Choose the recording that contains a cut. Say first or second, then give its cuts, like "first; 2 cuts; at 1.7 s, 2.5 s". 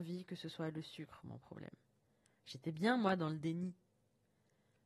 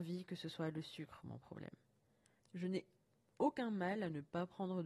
second; 1 cut; at 2.4 s